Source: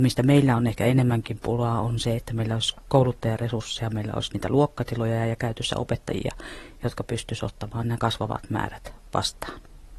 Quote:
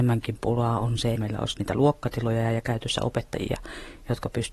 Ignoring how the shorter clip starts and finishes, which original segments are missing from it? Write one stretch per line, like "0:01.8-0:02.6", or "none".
0:02.2-0:03.9